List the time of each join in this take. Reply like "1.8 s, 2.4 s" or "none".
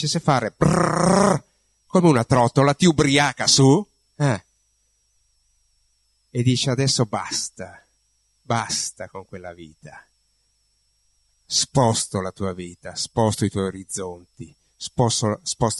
none